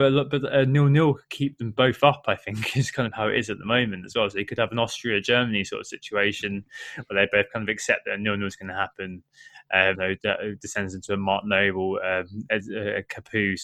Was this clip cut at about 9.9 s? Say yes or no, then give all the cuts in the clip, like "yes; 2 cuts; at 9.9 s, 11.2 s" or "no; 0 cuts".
yes; 1 cut; at 9.9 s